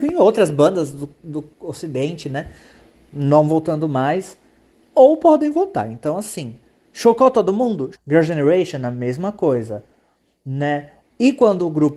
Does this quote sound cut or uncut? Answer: cut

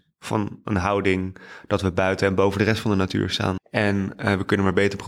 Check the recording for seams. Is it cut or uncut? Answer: cut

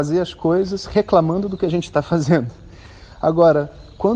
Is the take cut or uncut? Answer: uncut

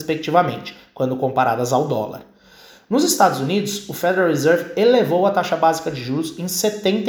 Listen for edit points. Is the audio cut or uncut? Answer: uncut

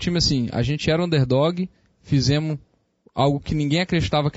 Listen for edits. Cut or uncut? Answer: uncut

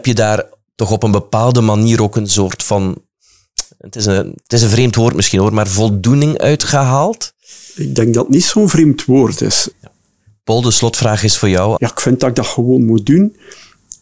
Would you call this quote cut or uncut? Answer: cut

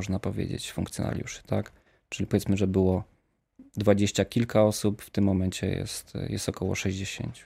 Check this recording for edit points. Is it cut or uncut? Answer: uncut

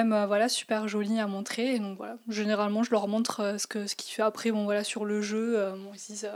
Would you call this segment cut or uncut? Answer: uncut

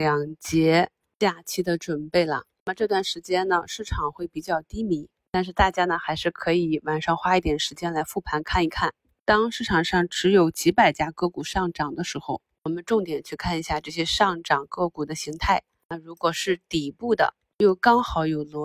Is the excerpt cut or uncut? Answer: uncut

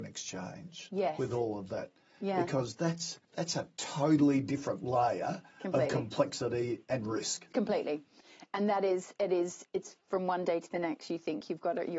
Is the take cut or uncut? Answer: cut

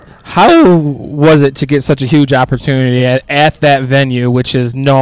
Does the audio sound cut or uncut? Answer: uncut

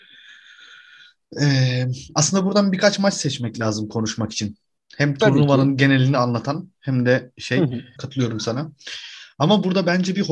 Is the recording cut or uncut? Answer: cut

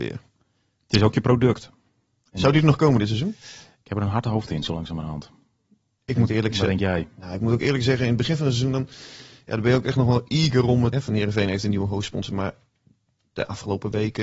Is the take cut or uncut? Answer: cut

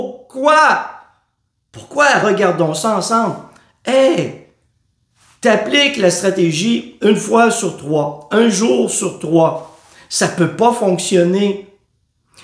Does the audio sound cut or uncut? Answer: uncut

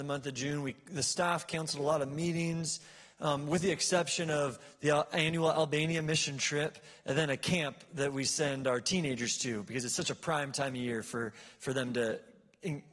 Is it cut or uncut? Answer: uncut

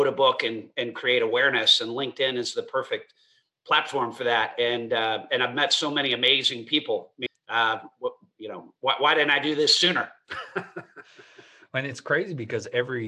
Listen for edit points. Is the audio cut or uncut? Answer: cut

